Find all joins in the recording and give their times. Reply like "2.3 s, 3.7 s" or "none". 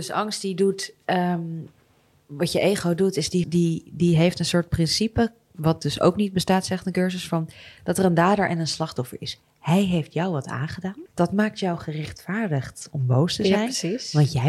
3.4 s, 11.1 s